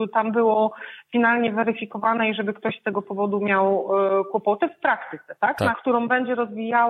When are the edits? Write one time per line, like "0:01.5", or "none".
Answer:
0:05.7